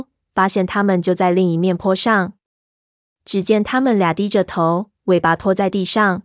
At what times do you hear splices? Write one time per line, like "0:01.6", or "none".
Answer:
none